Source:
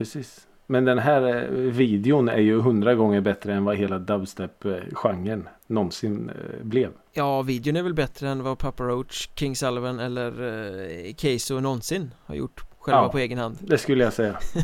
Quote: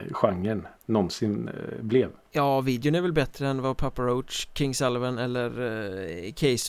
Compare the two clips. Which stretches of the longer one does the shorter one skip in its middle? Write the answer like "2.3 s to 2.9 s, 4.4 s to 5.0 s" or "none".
none